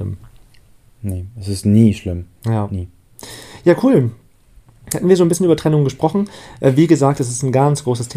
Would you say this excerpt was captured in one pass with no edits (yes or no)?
yes